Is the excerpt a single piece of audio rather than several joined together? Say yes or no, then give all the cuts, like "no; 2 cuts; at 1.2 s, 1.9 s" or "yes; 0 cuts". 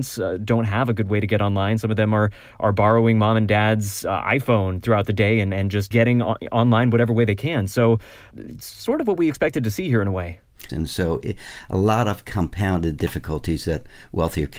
no; 3 cuts; at 5.9 s, 8.3 s, 10.7 s